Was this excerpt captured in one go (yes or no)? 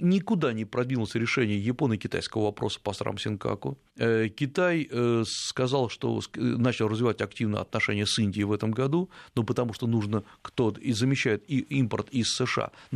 no